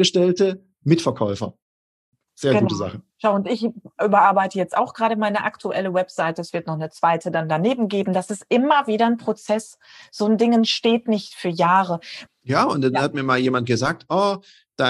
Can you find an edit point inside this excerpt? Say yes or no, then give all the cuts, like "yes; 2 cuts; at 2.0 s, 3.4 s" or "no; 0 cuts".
yes; 2 cuts; at 3.1 s, 12.3 s